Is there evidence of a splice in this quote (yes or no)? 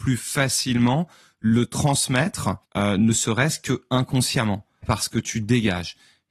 yes